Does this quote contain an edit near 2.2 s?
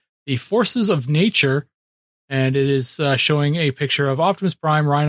no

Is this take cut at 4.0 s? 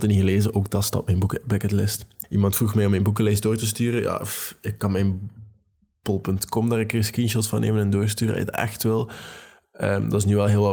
no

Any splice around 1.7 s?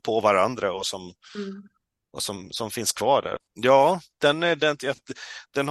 no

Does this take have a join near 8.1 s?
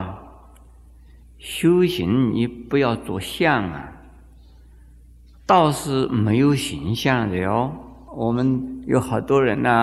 yes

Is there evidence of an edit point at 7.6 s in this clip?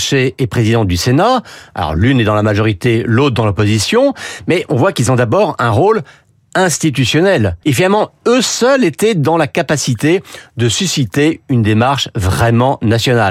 yes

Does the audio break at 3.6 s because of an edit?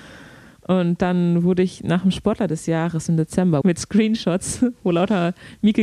yes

